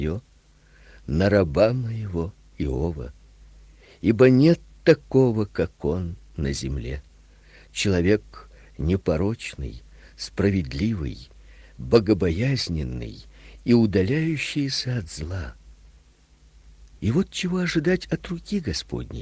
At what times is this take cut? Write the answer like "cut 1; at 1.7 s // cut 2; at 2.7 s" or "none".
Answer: cut 1; at 17.0 s